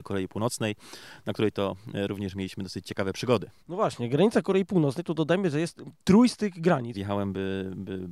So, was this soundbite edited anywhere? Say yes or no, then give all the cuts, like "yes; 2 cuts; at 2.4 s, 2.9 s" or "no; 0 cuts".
yes; 2 cuts; at 3.6 s, 6.9 s